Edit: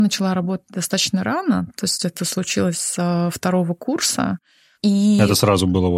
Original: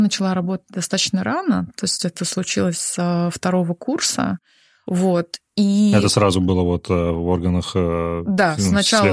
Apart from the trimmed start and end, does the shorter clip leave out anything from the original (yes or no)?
yes